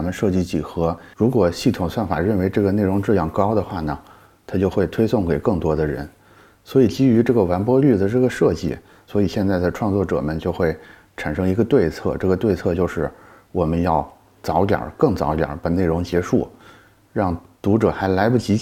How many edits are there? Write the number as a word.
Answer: one